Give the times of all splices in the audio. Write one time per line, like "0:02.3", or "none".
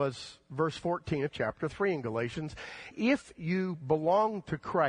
0:02.9